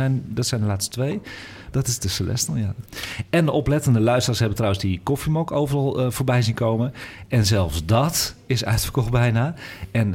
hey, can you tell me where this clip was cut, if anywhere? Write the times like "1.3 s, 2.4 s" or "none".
1.7 s